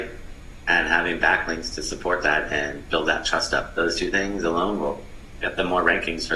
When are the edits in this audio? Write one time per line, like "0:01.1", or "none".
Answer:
none